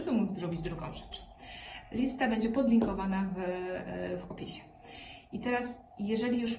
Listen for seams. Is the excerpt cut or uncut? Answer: uncut